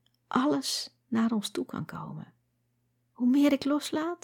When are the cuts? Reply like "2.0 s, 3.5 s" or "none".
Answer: 3.1 s

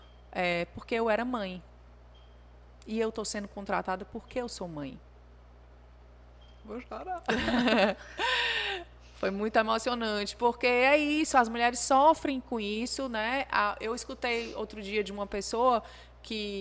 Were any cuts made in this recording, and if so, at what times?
none

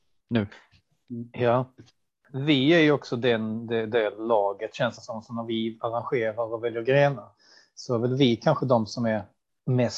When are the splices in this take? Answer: none

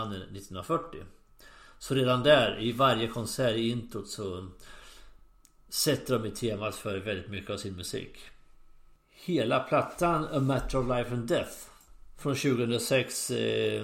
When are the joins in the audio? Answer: none

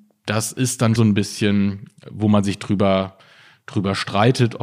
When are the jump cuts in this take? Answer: 1.0 s

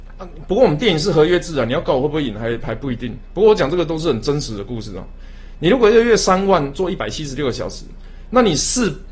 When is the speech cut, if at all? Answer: none

